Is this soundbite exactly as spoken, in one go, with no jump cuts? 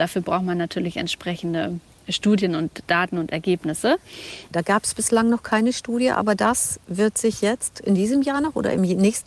no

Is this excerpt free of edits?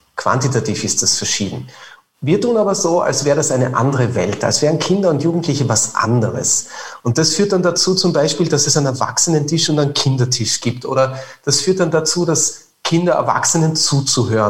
yes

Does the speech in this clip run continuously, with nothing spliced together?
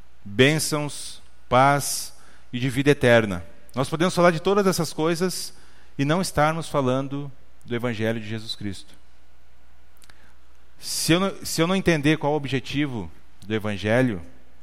yes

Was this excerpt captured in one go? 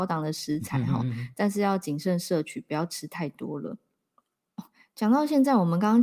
yes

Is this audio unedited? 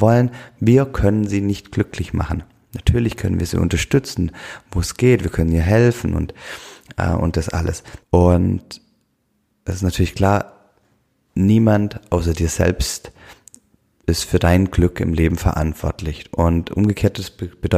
no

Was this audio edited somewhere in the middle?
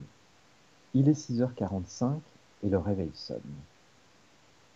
no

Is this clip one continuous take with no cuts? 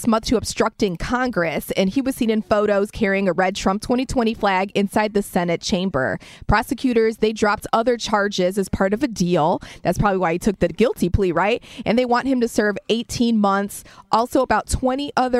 yes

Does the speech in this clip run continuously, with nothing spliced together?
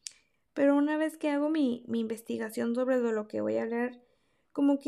yes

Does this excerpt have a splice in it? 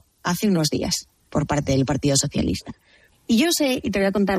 yes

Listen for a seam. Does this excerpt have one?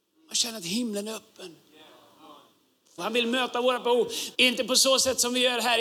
yes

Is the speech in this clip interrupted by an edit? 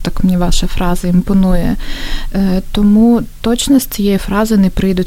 no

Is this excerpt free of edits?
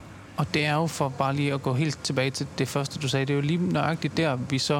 yes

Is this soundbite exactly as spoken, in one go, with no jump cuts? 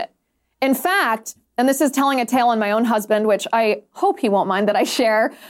yes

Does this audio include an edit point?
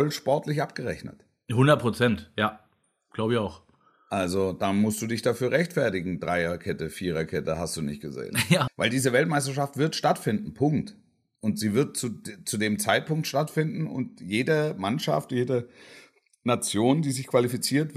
yes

